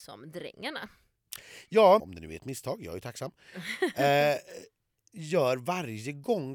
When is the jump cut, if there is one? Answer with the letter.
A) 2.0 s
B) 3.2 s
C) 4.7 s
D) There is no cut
A